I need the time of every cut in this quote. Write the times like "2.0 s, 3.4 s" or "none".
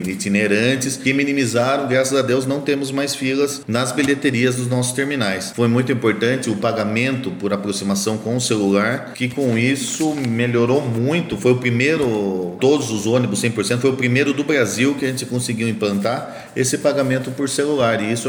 5.5 s, 12.6 s

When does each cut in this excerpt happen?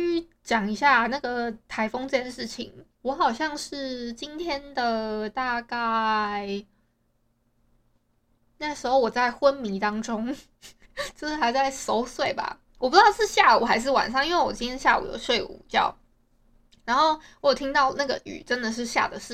2.9 s

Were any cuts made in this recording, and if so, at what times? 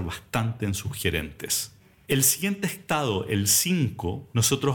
none

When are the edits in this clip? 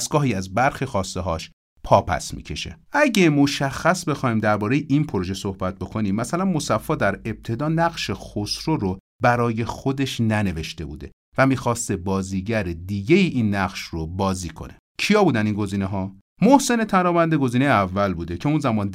2.8 s

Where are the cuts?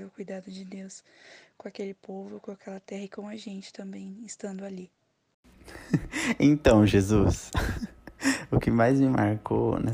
none

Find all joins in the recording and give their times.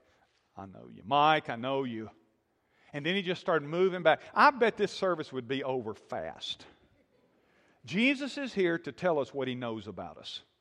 none

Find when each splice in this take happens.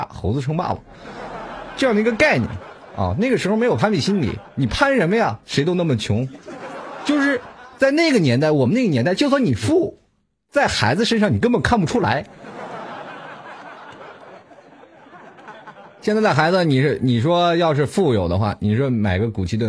none

